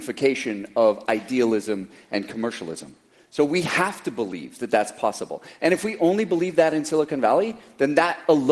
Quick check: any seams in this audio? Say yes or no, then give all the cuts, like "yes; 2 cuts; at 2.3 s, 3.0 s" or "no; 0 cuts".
no; 0 cuts